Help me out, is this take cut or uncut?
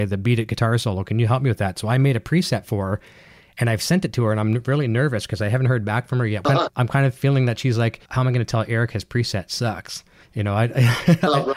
cut